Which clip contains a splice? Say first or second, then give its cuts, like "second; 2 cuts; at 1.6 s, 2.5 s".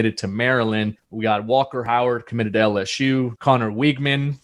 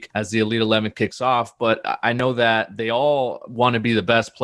first; 2 cuts; at 1.0 s, 3.4 s